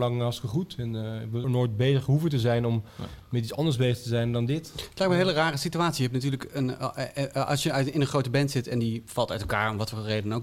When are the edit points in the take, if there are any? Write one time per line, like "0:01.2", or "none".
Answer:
0:01.4